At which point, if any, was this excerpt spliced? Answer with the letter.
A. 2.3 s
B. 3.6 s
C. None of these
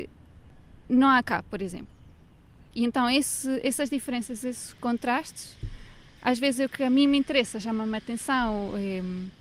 C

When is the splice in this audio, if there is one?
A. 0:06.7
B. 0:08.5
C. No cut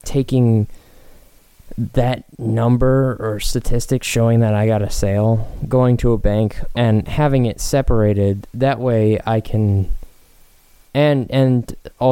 A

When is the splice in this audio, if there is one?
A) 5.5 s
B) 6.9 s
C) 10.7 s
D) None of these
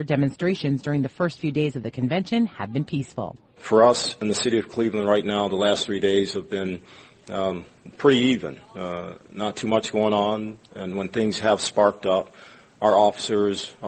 D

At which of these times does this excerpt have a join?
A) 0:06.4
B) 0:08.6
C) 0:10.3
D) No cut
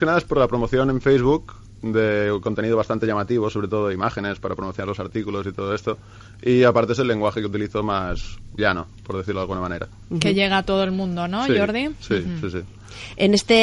B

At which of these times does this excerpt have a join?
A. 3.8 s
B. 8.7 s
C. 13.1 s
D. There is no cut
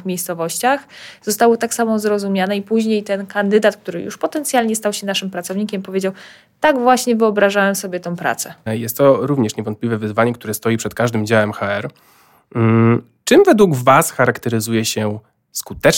B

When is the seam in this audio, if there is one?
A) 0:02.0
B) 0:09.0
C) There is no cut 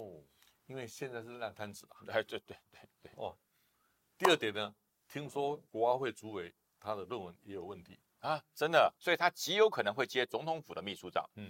B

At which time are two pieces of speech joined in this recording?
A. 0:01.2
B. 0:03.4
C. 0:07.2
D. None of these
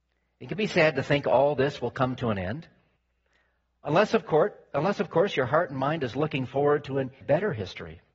C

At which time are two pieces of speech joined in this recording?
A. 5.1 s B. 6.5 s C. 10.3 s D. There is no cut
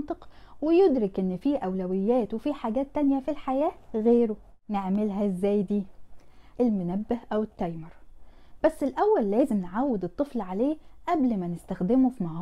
B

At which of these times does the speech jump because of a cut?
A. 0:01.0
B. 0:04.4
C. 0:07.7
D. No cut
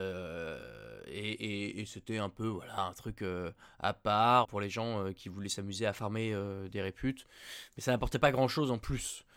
B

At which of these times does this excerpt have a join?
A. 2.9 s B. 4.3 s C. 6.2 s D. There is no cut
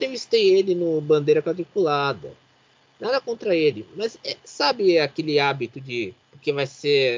C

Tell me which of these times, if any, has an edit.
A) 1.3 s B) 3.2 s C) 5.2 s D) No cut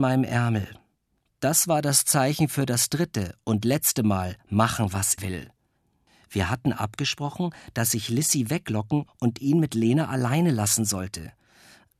C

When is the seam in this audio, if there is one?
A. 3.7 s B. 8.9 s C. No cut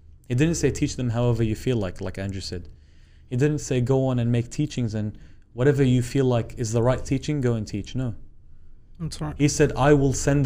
B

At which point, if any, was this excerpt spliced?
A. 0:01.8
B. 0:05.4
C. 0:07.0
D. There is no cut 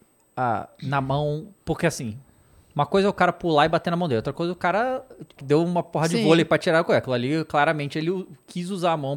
B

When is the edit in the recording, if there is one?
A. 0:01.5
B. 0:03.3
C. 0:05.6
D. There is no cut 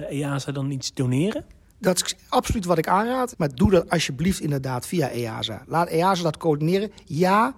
B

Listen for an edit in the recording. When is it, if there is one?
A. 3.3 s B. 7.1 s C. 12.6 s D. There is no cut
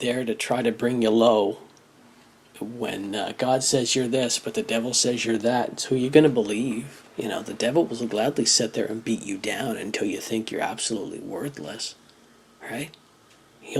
B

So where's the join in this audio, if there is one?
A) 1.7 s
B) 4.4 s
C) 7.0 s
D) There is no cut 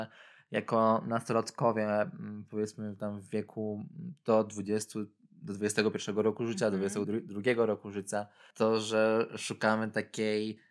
C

